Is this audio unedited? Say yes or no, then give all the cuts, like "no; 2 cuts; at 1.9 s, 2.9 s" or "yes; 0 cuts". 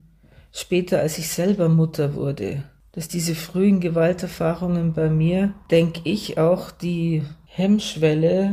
yes; 0 cuts